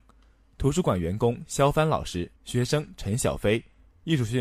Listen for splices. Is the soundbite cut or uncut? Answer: cut